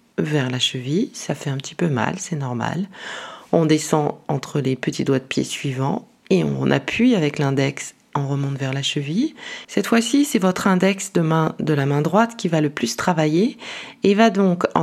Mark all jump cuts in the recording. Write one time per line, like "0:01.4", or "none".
0:09.6